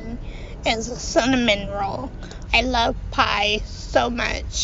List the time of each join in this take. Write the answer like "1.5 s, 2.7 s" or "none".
2.5 s